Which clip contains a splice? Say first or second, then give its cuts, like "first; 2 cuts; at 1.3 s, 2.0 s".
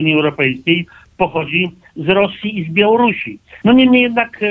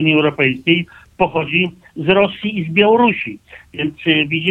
first; 1 cut; at 3.6 s